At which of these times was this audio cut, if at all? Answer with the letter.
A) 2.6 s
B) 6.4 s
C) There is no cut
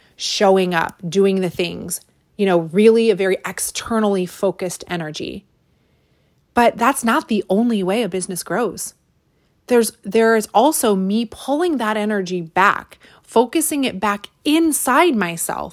C